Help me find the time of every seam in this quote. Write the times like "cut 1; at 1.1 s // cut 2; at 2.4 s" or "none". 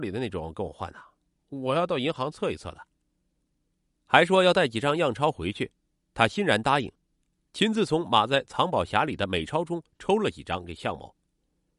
cut 1; at 3.5 s